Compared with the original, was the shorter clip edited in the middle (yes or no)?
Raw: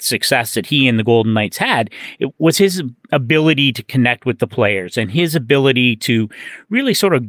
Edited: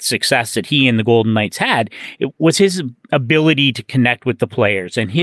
no